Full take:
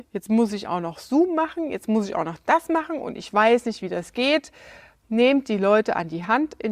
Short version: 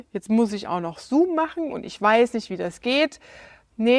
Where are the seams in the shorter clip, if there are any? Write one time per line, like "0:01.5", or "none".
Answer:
0:01.7